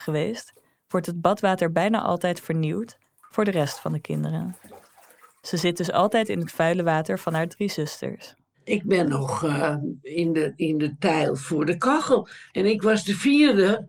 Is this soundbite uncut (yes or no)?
yes